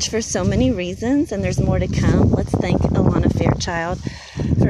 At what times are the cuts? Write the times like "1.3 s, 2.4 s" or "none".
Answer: none